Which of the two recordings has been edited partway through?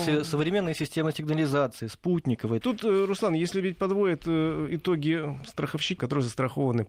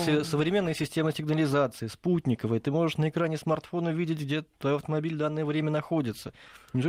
first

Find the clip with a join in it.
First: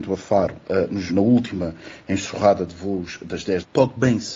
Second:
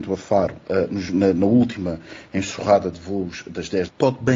first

